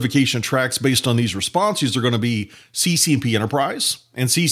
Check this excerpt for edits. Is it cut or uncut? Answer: uncut